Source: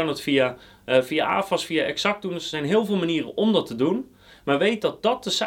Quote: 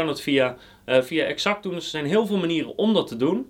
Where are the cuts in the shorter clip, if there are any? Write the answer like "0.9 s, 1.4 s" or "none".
1.1 s